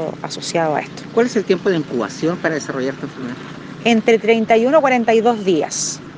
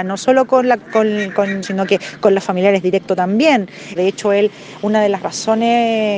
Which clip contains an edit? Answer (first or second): second